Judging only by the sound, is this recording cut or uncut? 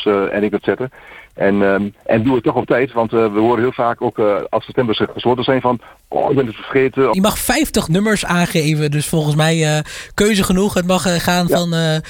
cut